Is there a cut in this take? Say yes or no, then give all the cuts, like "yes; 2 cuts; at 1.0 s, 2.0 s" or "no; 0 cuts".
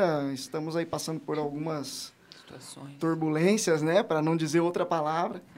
no; 0 cuts